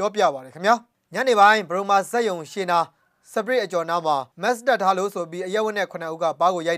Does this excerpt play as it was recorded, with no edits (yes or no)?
no